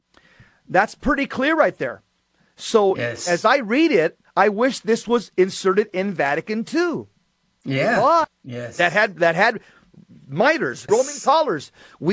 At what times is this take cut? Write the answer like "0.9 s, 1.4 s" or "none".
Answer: 8.2 s, 10.9 s